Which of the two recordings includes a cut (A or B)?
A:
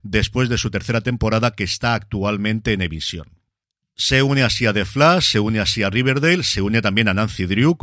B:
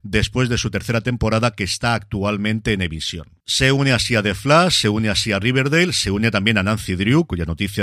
B